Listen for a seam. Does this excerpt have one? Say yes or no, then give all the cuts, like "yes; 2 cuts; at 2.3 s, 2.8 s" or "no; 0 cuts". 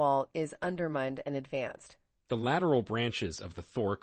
yes; 1 cut; at 2.2 s